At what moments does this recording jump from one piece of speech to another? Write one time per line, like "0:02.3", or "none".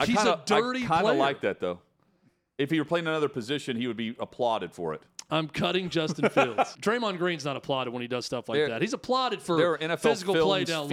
0:05.3
0:06.7